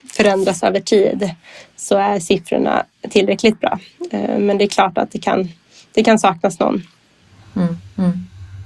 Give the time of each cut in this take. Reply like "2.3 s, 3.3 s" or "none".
none